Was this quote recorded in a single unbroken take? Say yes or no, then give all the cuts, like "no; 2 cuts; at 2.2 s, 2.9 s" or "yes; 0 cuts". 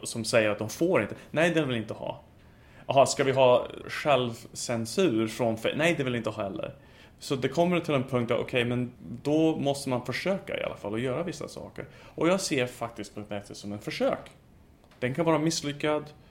yes; 0 cuts